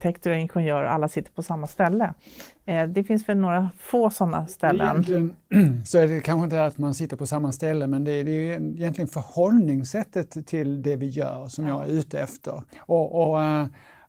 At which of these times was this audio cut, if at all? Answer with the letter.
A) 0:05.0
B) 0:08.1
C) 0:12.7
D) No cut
C